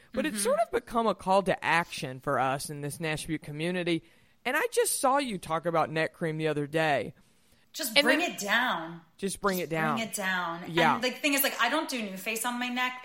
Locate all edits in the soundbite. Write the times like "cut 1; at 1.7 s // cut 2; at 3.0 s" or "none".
cut 1; at 7.6 s